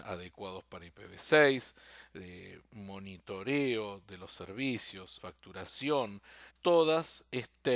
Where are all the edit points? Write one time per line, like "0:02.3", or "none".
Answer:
0:05.2
0:06.5